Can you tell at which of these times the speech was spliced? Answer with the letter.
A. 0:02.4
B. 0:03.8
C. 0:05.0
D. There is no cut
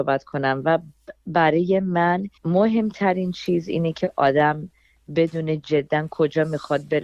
A